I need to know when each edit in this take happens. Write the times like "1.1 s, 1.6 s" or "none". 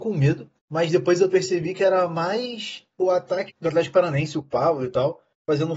3.5 s